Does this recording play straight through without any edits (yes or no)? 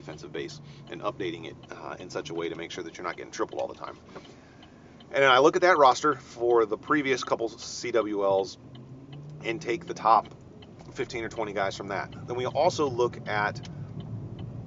yes